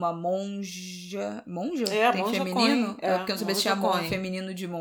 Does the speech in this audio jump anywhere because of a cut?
no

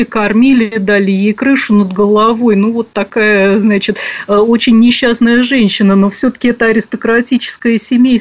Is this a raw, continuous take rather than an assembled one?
yes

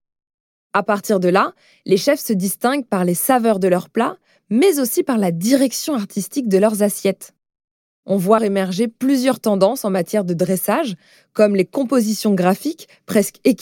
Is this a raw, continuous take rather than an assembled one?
no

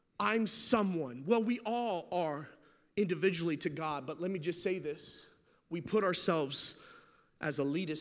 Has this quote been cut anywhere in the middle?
no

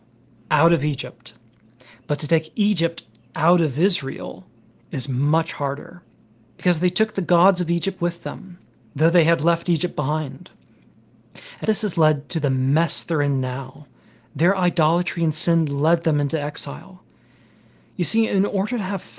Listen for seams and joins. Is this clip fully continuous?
no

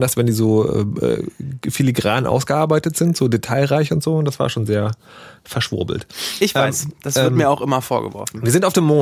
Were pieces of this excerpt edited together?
no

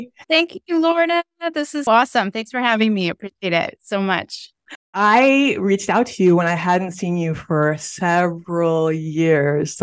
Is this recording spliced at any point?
yes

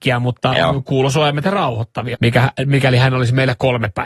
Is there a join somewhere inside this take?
yes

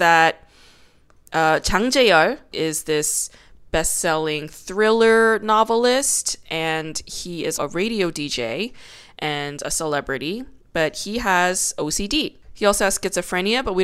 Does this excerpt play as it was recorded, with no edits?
no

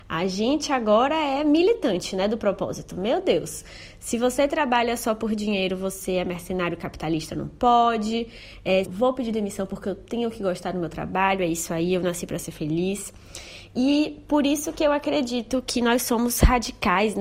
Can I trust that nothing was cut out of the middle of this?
no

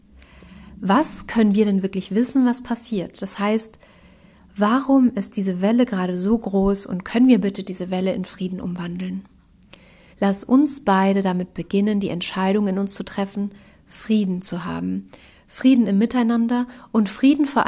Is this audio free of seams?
no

